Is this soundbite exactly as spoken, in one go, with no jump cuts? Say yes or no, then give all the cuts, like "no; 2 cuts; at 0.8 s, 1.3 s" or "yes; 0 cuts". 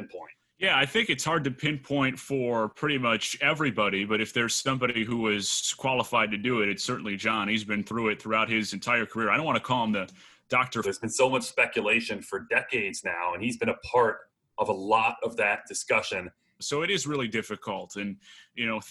no; 2 cuts; at 10.8 s, 16.6 s